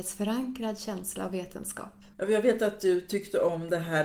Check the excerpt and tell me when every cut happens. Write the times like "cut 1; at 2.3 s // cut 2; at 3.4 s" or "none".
cut 1; at 2.1 s